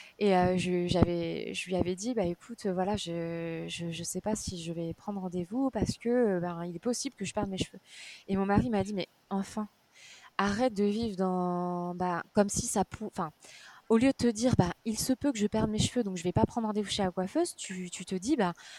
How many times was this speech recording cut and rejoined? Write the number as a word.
one